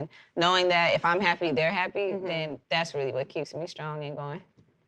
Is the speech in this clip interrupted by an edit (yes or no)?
no